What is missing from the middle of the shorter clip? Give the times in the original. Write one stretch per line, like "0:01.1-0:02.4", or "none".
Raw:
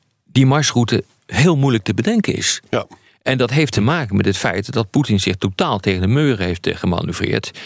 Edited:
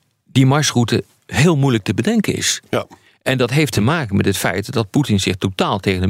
none